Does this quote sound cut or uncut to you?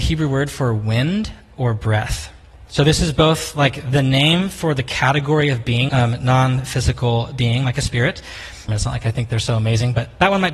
cut